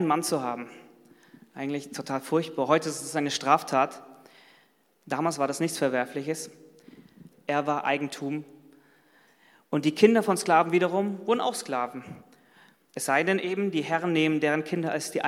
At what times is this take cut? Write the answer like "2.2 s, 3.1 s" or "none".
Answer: 7.3 s